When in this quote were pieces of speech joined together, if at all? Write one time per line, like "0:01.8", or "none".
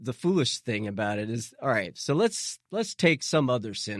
none